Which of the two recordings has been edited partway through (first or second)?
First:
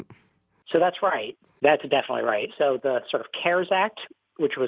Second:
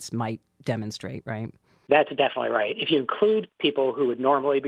first